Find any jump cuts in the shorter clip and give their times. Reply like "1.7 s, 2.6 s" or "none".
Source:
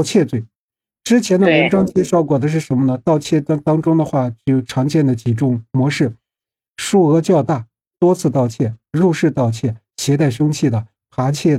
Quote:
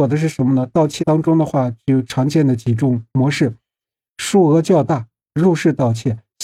1.0 s, 5.3 s